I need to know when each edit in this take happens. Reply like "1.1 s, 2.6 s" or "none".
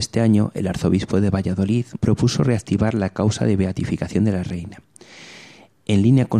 2.0 s